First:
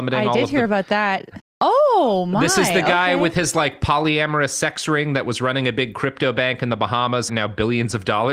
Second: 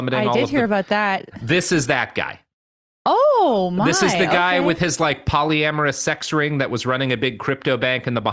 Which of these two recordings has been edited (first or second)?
first